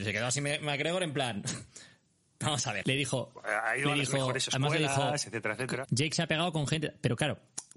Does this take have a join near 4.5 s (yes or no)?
no